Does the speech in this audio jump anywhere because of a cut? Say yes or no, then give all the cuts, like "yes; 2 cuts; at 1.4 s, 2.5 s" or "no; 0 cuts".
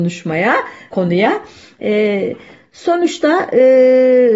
yes; 1 cut; at 0.9 s